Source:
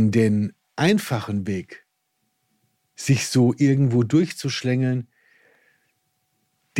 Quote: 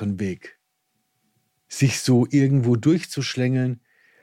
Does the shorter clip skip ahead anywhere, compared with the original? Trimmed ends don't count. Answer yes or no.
no